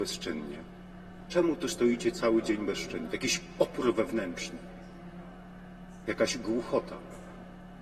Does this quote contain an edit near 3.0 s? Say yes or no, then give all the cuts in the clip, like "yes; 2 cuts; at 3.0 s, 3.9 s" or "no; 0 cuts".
yes; 2 cuts; at 1.3 s, 3.0 s